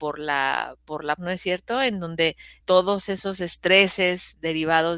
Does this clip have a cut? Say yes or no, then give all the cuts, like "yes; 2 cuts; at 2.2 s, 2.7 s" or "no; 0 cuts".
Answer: yes; 2 cuts; at 1.2 s, 2.6 s